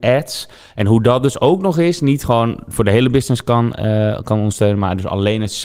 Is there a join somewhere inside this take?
no; 0 cuts

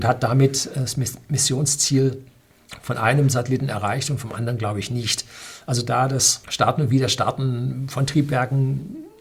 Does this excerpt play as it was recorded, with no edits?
no; 1 cut; at 6.4 s

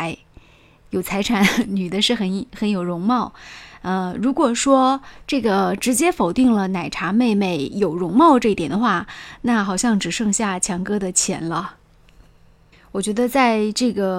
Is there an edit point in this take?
yes; 1 cut; at 12.7 s

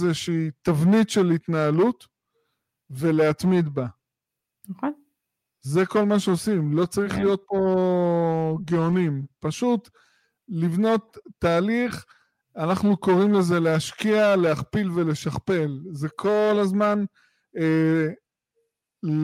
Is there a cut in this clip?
no; 0 cuts

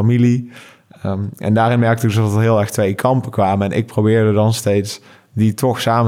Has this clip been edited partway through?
no; 0 cuts

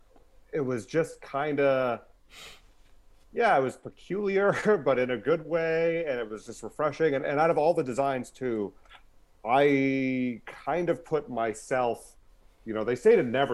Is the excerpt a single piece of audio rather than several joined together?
yes; 0 cuts

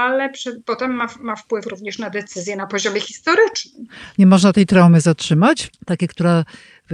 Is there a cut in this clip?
yes; 1 cut; at 5.7 s

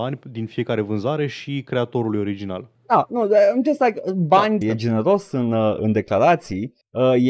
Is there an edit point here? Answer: yes; 2 cuts; at 4.6 s, 5.8 s

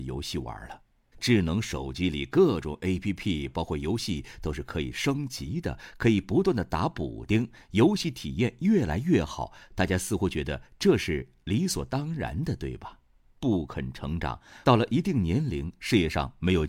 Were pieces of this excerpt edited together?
yes; 3 cuts; at 1.1 s, 13.3 s, 14.6 s

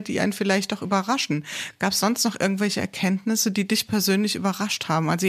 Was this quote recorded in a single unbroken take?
yes; 0 cuts

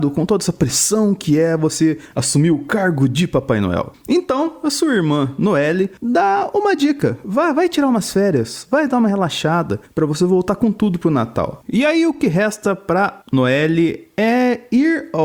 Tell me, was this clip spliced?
yes; 1 cut; at 11.6 s

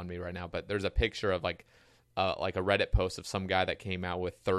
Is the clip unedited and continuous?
yes; 0 cuts

